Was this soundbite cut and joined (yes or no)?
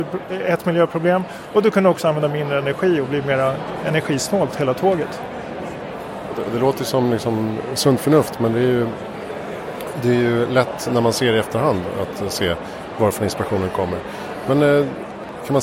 no